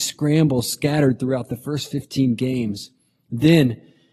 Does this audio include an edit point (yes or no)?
no